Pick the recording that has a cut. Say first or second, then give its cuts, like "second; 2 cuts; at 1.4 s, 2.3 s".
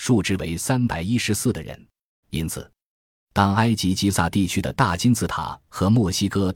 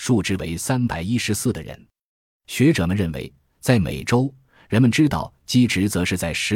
first; 1 cut; at 2.2 s